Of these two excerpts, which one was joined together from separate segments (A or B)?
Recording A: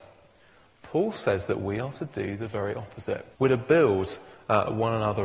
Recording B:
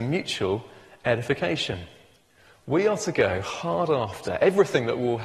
A